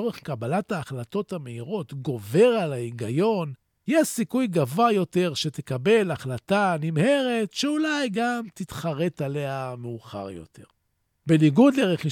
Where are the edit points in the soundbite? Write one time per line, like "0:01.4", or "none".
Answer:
none